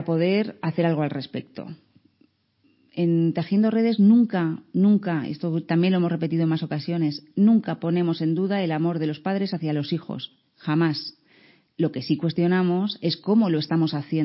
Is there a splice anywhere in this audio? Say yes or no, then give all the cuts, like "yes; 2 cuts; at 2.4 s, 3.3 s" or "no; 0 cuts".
no; 0 cuts